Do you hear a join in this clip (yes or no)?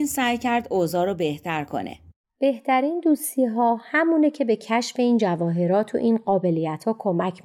yes